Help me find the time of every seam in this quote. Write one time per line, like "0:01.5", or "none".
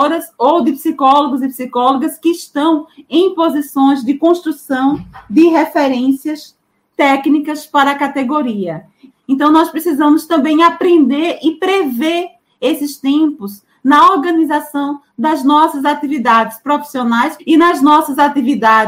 0:09.1
0:17.4